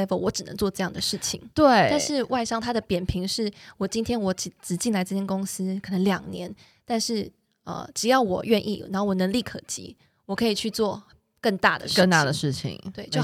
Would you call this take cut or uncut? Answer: uncut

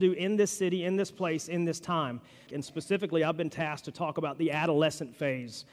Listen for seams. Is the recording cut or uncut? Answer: cut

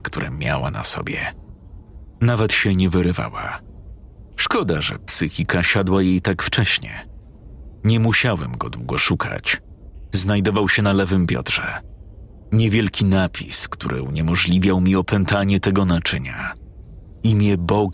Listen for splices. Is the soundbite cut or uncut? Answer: uncut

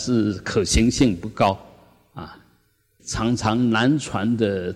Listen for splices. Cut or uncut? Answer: cut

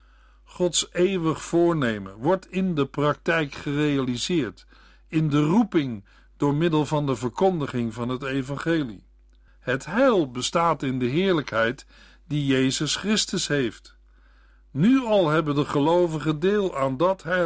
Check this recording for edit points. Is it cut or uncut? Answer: cut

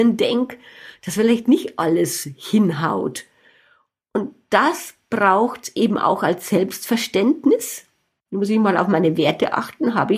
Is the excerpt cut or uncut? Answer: uncut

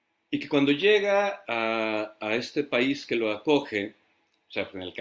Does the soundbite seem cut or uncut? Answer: uncut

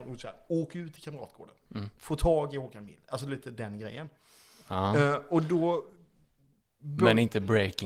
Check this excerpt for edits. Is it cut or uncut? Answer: uncut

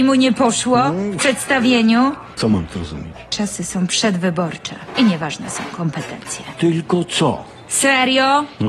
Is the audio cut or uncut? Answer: cut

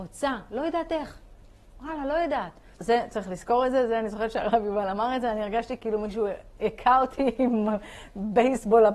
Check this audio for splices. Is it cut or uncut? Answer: cut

